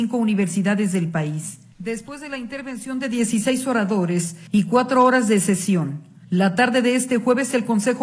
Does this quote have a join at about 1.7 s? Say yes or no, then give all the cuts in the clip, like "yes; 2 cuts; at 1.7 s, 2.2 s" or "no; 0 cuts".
yes; 1 cut; at 1.7 s